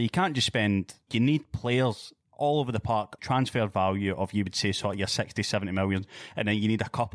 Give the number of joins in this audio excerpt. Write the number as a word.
two